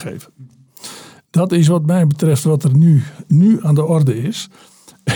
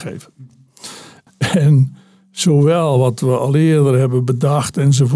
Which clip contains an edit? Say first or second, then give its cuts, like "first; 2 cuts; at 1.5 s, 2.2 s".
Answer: second; 1 cut; at 1.3 s